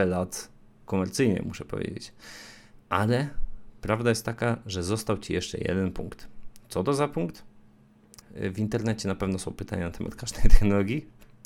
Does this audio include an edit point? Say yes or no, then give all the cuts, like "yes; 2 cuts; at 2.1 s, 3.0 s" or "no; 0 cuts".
yes; 1 cut; at 8.2 s